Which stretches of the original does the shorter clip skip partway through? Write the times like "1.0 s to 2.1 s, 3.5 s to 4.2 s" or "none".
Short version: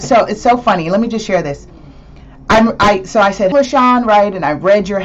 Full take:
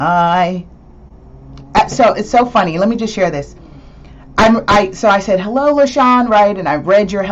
5.4 s to 5.7 s